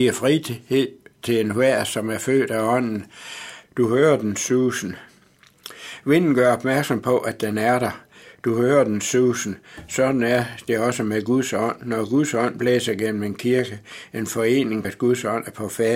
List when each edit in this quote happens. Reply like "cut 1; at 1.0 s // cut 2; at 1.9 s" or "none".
cut 1; at 3.6 s // cut 2; at 14.8 s